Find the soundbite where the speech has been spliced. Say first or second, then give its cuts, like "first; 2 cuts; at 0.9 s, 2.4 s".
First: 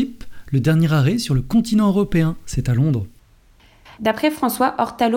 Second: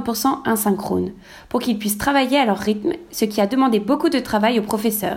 first; 1 cut; at 3.9 s